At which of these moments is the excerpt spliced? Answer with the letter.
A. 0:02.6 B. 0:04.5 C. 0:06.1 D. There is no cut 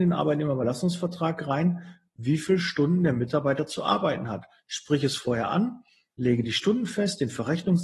D